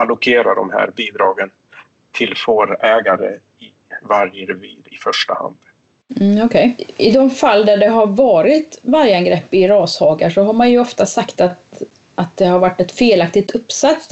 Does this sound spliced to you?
no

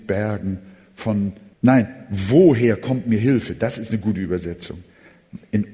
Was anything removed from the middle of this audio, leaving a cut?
yes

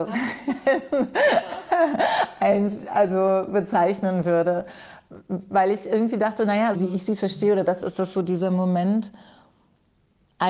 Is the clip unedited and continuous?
no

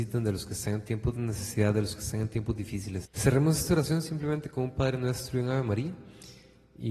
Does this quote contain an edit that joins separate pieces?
yes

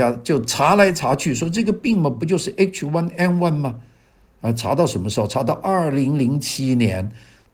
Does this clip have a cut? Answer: no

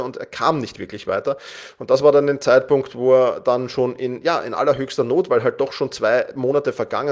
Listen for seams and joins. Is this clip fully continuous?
yes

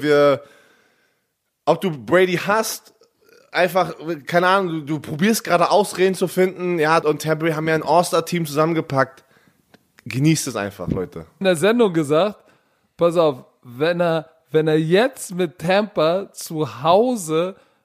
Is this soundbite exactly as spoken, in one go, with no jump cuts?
no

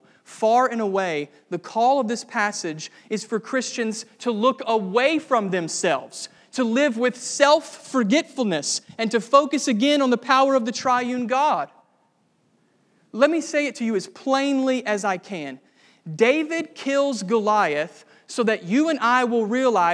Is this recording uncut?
yes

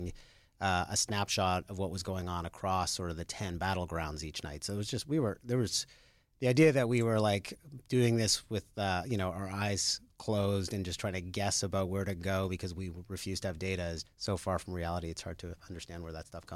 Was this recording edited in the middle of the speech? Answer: yes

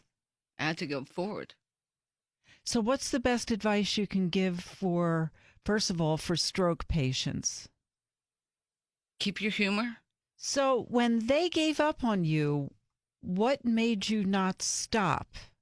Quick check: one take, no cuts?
no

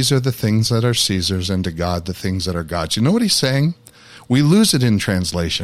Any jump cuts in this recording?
no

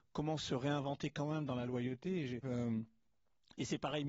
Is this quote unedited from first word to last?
no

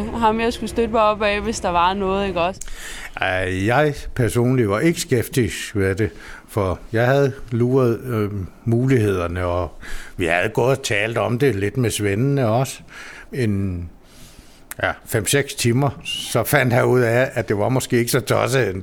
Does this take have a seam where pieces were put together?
yes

